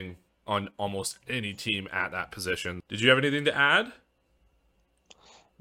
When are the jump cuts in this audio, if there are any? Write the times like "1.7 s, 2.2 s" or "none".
2.8 s